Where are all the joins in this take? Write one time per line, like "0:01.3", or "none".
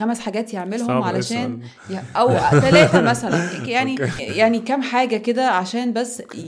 0:04.2